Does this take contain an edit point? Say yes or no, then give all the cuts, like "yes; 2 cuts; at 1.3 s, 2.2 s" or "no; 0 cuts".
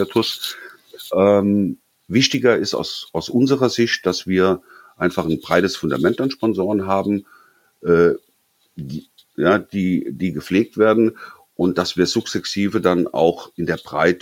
yes; 1 cut; at 9.2 s